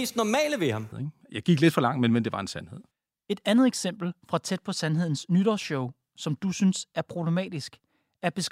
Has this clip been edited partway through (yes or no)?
yes